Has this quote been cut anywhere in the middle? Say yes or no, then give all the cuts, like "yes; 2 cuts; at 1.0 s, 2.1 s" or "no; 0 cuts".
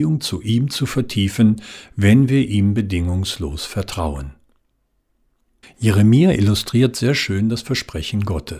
yes; 1 cut; at 5.6 s